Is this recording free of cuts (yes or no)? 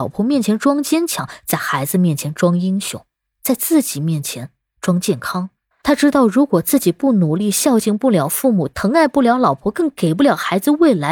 no